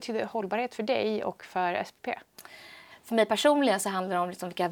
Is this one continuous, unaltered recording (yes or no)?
no